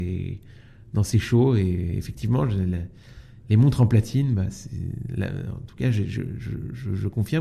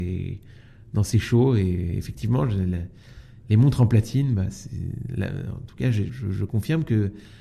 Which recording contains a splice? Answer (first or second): second